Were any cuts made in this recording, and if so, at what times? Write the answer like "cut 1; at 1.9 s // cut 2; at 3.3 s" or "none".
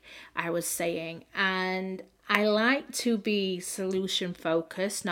none